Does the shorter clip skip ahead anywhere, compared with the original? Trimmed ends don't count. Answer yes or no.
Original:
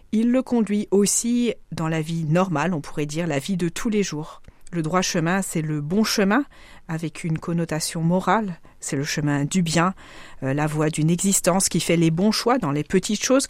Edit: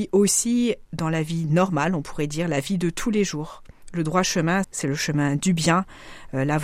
yes